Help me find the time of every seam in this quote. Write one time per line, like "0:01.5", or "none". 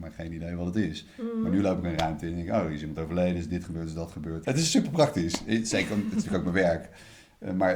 0:04.4